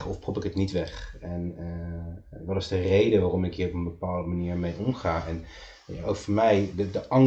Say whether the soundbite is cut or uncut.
uncut